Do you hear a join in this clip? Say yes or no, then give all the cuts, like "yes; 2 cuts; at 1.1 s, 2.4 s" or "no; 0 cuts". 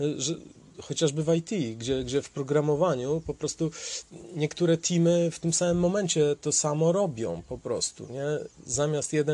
no; 0 cuts